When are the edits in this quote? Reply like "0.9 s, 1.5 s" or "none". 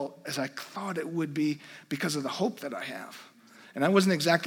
none